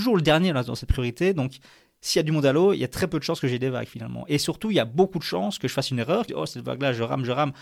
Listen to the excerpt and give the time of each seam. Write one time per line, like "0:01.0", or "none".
0:06.3

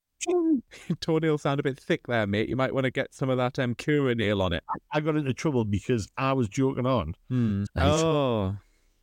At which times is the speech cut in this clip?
0:04.6
0:07.7

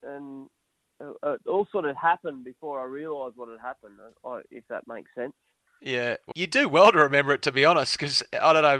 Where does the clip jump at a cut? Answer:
0:06.3

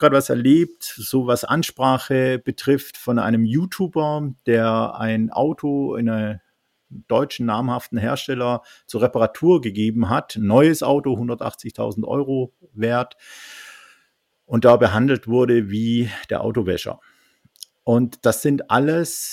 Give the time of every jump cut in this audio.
none

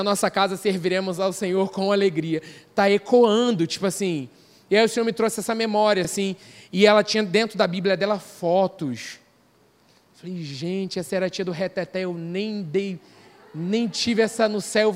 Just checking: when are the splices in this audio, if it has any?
none

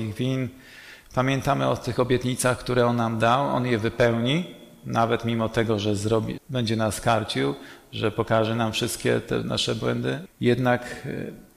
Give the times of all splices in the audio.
0:06.4
0:10.3

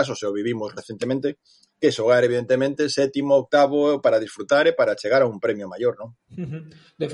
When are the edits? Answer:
0:06.2

